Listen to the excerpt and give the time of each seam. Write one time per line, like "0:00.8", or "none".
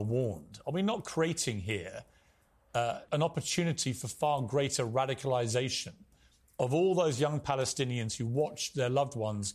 0:03.1